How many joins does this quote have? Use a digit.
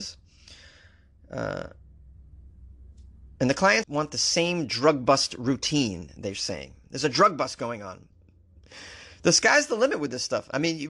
2